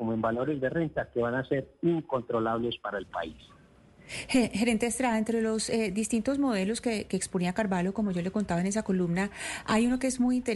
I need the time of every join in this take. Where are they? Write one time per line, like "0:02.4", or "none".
none